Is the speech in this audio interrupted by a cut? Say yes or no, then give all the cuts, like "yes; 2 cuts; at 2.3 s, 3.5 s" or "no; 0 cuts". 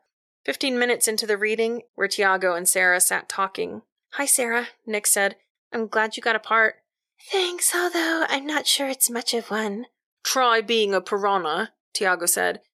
yes; 1 cut; at 1.9 s